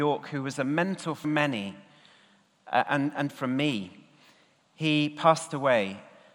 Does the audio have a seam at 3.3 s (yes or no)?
yes